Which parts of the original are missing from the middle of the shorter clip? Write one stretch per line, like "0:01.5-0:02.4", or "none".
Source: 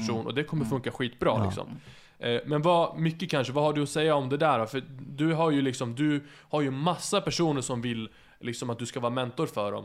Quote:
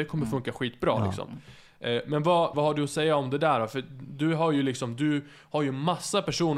0:02.9-0:03.5